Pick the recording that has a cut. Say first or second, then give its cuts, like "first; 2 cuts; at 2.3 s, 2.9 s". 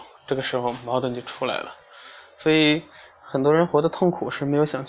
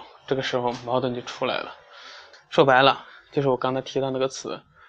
second; 1 cut; at 2.3 s